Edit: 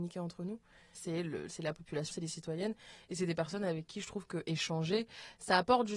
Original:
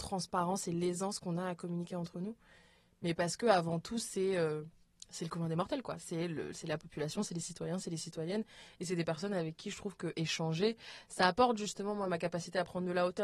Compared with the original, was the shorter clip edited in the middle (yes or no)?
yes